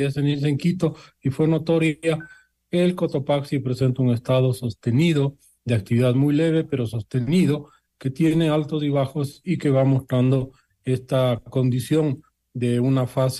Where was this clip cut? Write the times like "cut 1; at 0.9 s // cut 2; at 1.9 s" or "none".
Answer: none